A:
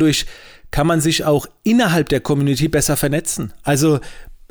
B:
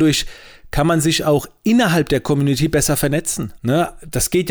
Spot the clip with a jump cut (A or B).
B